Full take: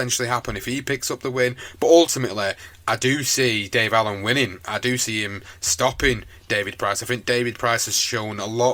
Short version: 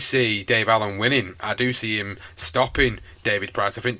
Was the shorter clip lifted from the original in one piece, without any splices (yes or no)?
yes